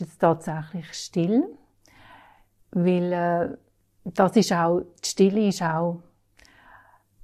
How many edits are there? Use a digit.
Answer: 0